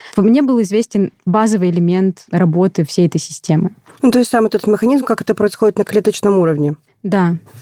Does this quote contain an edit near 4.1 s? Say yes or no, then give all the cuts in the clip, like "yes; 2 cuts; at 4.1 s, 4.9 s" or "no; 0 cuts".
no; 0 cuts